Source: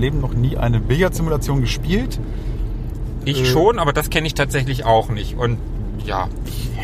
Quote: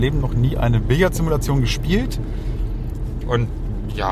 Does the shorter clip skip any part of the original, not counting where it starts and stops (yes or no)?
yes